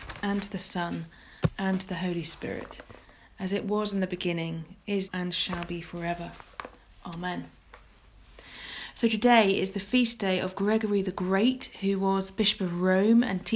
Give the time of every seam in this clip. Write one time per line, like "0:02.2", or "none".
0:05.1